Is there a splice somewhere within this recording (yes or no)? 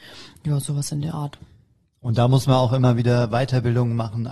no